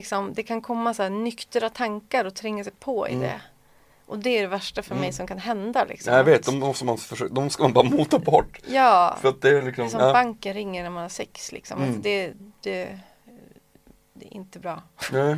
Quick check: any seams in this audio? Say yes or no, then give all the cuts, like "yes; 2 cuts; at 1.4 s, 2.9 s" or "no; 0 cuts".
yes; 1 cut; at 12.4 s